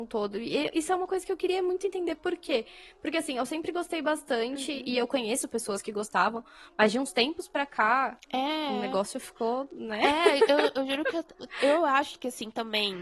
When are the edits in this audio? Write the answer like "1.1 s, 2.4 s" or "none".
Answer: none